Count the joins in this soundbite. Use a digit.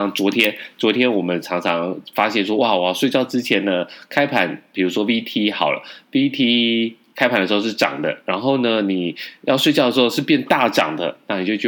0